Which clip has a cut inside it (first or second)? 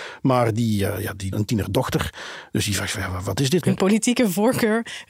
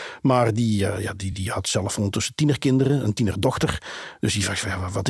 first